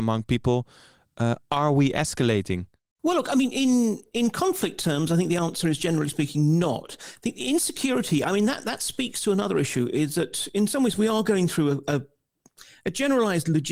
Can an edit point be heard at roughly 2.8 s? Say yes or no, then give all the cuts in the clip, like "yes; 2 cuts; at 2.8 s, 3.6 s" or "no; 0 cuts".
no; 0 cuts